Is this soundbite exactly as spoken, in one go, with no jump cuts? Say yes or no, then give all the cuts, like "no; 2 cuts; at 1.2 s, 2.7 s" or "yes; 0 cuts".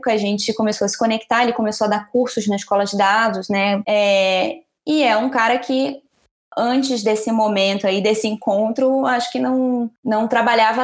no; 1 cut; at 3.8 s